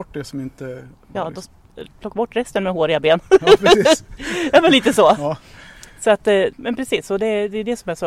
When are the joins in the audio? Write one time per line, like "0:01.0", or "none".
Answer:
0:01.1
0:06.5